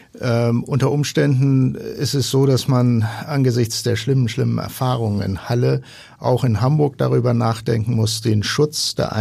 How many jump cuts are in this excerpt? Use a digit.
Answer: 0